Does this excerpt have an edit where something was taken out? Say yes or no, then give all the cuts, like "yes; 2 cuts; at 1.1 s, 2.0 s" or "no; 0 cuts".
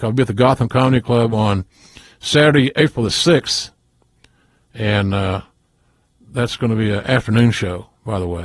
no; 0 cuts